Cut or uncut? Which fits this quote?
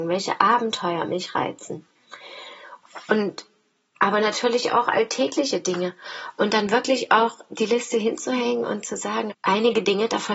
cut